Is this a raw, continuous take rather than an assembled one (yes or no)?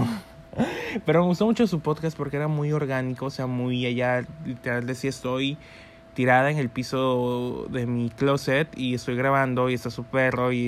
yes